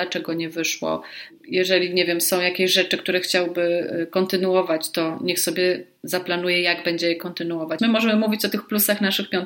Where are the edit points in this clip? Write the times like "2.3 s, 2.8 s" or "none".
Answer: 7.8 s